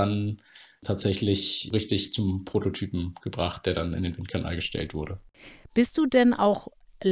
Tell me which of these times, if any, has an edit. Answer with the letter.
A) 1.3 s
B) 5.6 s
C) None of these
C